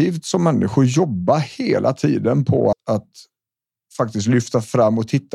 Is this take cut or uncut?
cut